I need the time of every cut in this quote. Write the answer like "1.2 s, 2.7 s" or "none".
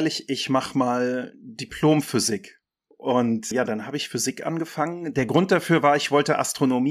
3.5 s